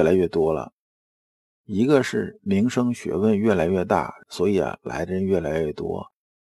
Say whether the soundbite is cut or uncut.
cut